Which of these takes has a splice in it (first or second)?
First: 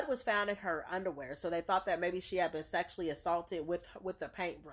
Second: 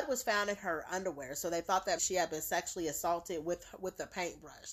second